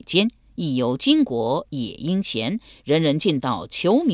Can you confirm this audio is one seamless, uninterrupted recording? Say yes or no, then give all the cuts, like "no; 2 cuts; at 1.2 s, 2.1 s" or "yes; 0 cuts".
yes; 0 cuts